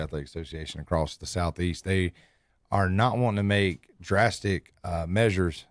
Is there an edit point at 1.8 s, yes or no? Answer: no